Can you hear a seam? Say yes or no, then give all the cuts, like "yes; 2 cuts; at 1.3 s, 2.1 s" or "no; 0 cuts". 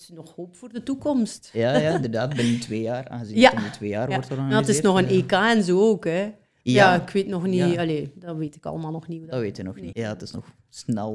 yes; 1 cut; at 9.9 s